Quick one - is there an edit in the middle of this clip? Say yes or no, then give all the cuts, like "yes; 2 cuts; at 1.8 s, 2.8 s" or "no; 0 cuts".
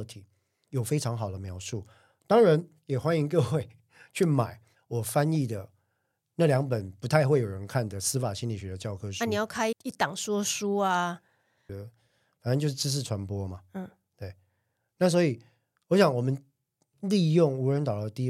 yes; 1 cut; at 9.7 s